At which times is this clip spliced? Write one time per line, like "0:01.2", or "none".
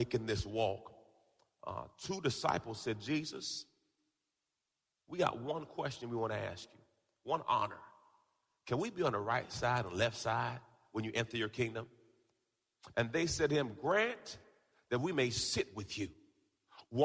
0:12.9